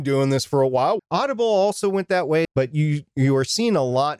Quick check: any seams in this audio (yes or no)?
yes